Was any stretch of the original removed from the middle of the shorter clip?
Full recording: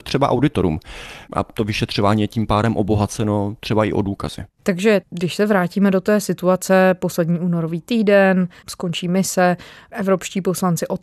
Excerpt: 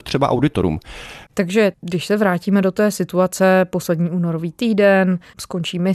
yes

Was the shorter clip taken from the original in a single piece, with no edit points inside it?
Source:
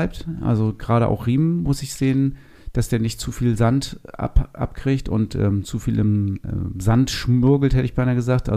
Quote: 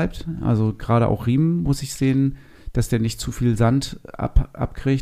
yes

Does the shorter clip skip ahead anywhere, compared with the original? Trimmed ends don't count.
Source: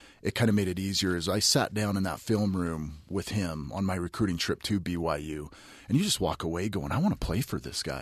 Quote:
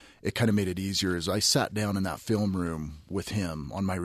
no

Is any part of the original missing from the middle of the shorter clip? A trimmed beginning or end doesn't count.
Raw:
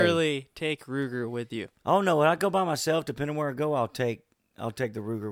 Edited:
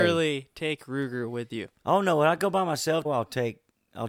yes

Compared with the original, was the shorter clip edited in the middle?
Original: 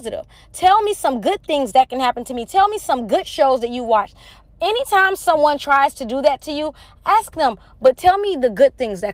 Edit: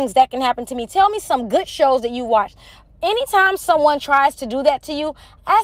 no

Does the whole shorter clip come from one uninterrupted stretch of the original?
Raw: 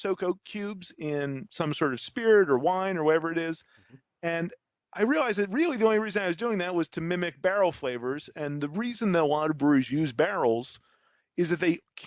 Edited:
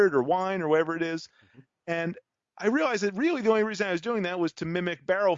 yes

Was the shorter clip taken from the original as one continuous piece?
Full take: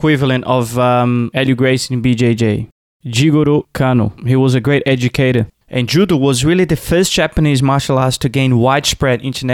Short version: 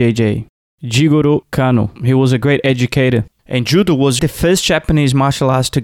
no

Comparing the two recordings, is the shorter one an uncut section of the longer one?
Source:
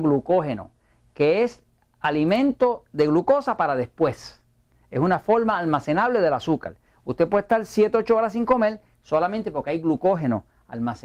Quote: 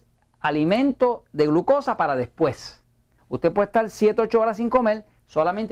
no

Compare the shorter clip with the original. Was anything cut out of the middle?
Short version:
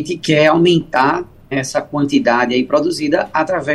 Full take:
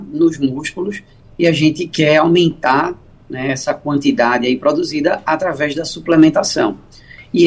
yes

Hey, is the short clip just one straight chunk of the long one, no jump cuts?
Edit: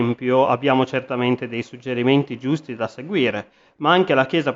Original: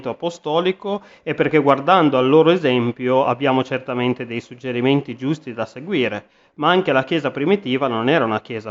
yes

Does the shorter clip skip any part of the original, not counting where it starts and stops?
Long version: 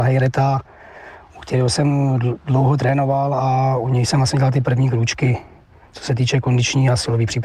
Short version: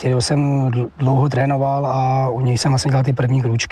no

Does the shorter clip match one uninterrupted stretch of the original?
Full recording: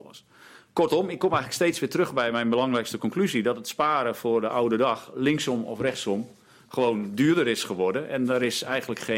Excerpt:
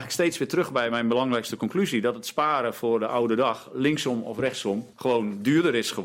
no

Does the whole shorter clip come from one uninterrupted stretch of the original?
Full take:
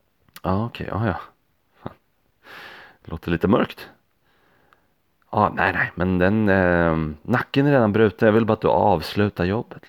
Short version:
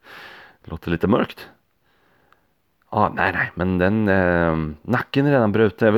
yes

